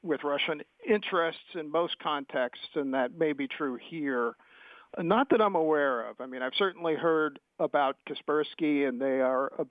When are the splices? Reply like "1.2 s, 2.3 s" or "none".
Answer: 4.9 s